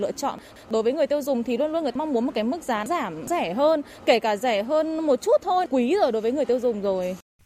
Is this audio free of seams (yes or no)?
yes